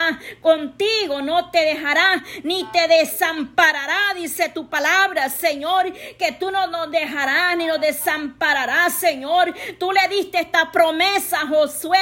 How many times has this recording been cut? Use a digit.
0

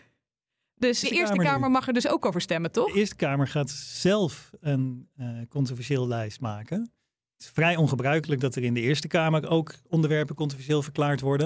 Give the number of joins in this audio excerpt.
0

